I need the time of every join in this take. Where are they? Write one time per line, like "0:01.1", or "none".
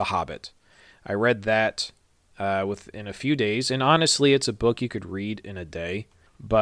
none